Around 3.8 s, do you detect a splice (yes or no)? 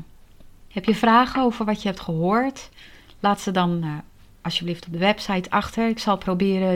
no